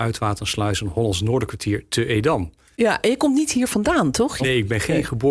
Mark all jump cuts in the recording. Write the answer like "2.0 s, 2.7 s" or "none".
2.7 s, 4.4 s